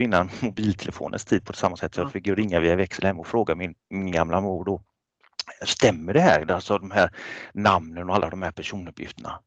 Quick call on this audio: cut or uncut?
uncut